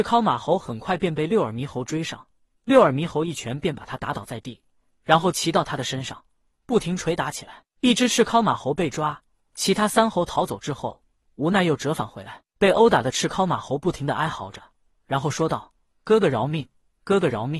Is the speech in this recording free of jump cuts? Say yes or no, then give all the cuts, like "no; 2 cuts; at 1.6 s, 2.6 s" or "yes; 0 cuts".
yes; 0 cuts